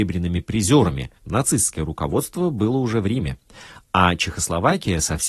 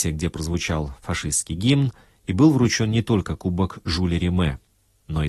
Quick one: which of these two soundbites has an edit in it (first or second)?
first